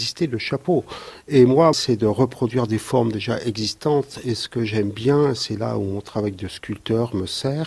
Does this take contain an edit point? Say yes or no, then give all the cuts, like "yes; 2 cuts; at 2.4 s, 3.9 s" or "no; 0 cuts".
yes; 1 cut; at 1.7 s